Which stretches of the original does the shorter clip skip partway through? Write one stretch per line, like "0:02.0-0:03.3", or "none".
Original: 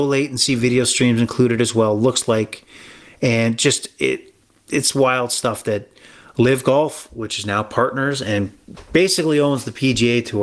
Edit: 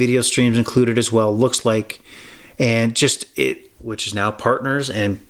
0:04.4-0:07.1